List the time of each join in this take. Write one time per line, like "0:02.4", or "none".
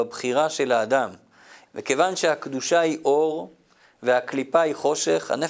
0:01.6